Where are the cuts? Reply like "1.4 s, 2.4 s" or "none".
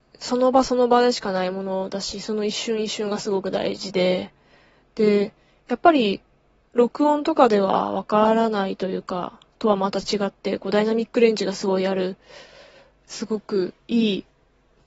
none